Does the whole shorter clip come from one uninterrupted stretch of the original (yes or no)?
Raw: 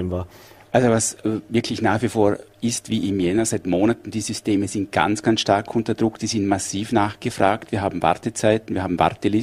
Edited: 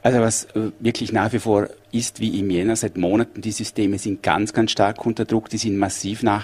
yes